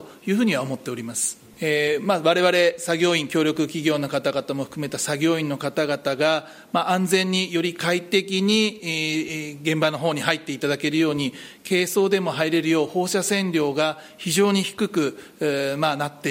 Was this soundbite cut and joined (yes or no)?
yes